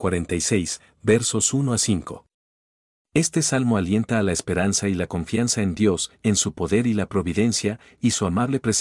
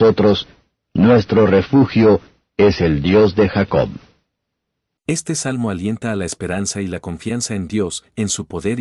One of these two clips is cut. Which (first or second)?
second